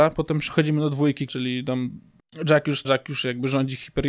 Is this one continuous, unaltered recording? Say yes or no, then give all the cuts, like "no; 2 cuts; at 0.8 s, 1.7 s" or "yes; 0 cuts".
no; 2 cuts; at 1.3 s, 2.8 s